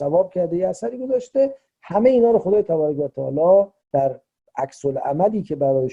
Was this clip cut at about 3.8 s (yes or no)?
yes